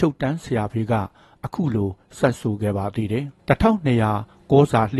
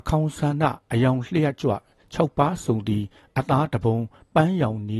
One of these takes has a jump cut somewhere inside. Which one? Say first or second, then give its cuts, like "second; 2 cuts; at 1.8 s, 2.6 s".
first; 1 cut; at 3.4 s